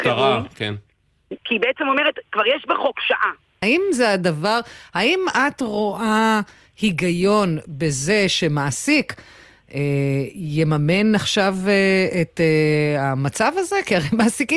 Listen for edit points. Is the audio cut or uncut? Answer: cut